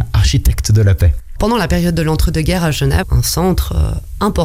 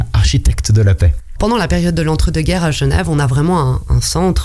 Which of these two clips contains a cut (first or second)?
first